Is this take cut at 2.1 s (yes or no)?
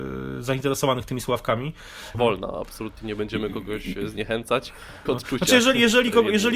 yes